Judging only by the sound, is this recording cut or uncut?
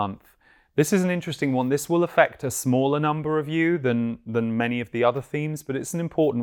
uncut